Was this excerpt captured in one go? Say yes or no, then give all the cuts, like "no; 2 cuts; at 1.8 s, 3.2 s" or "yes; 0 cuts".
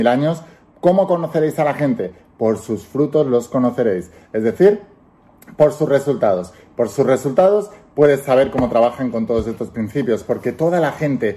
yes; 0 cuts